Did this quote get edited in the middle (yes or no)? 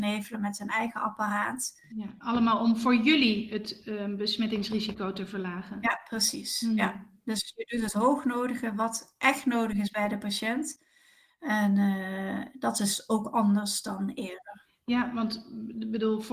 no